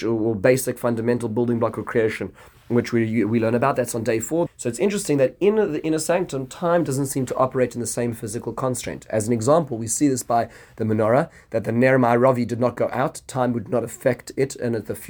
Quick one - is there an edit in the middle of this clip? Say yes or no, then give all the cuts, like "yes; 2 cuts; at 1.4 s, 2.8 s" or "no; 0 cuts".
yes; 1 cut; at 4.5 s